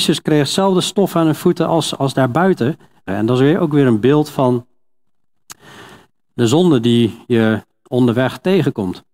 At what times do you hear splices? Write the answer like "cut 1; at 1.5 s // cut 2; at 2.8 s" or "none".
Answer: cut 1; at 3.1 s